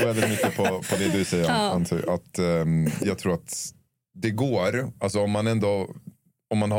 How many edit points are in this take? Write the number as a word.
zero